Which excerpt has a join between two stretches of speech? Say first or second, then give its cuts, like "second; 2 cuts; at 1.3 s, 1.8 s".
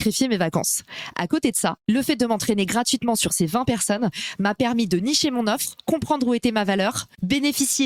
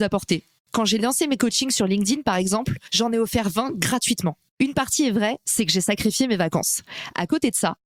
second; 1 cut; at 4.5 s